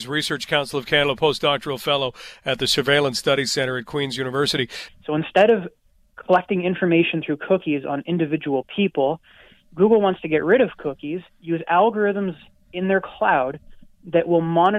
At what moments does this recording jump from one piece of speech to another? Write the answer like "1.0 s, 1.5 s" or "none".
4.9 s